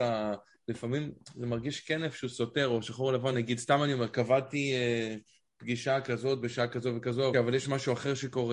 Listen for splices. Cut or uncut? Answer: cut